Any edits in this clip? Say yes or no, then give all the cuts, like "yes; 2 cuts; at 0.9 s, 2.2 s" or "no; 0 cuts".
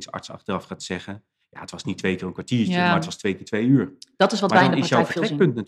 no; 0 cuts